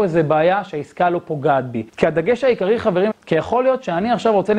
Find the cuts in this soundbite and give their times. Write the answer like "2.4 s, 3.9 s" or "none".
1.9 s, 3.1 s